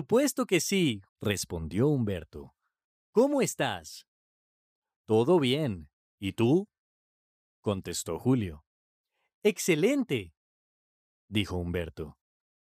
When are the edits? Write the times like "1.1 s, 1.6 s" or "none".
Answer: 1.1 s